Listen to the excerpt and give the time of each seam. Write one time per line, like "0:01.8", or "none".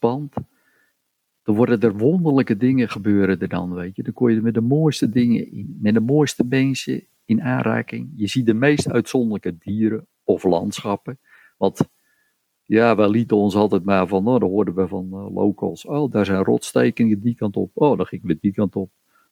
0:05.5